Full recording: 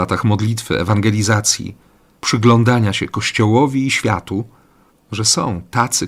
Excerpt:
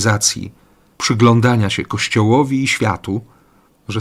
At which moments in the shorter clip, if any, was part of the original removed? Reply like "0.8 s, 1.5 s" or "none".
none